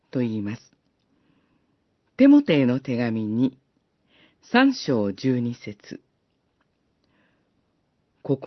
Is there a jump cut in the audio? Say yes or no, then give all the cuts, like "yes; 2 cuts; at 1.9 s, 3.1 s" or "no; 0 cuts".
no; 0 cuts